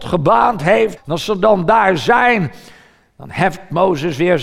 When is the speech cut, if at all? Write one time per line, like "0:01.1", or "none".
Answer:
0:01.0